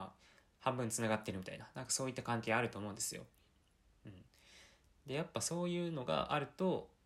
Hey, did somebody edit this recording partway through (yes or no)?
no